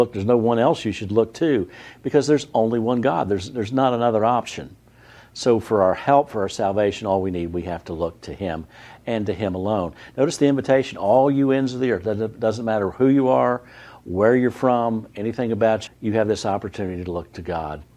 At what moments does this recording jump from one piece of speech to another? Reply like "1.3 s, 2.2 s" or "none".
15.9 s